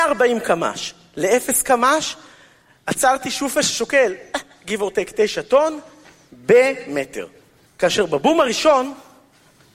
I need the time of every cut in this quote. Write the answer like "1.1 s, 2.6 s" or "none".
7.7 s